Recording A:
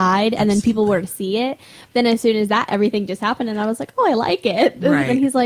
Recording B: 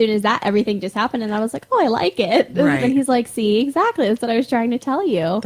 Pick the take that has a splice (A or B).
A